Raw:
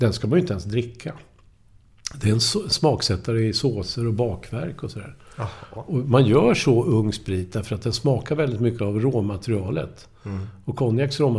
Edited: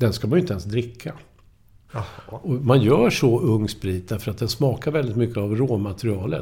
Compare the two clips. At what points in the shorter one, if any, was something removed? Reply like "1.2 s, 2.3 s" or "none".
1.9 s